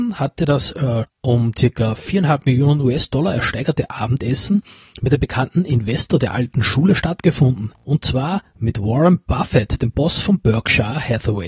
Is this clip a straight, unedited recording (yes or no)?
no